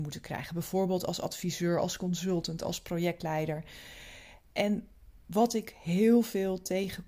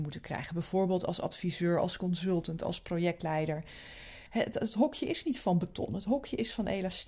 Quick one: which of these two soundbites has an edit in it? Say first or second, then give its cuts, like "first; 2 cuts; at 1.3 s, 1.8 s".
second; 1 cut; at 4.3 s